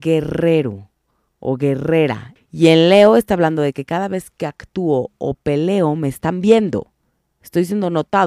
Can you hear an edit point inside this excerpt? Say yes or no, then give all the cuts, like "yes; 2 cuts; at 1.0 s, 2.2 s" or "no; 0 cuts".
yes; 1 cut; at 2.4 s